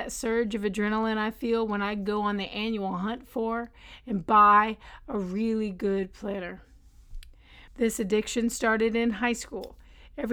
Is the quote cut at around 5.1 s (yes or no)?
no